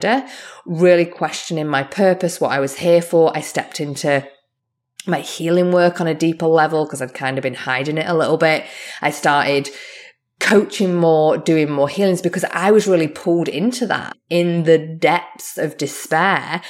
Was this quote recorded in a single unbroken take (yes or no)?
yes